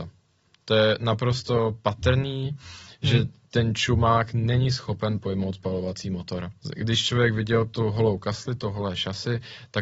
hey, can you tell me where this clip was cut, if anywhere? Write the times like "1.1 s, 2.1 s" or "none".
6.6 s